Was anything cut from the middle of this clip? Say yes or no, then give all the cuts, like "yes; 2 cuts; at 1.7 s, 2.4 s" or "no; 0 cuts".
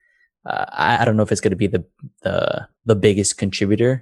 yes; 1 cut; at 2.8 s